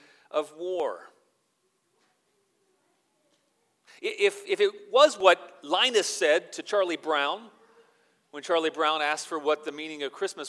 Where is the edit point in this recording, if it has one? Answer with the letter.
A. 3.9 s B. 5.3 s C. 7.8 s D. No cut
A